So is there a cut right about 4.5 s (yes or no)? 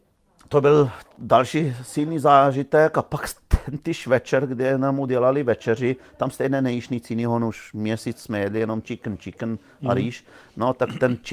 no